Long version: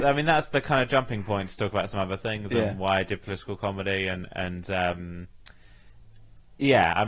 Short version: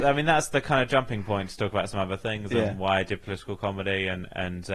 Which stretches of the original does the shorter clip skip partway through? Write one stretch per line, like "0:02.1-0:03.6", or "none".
none